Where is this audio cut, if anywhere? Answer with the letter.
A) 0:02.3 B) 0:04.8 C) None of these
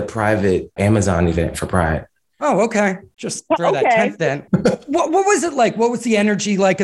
C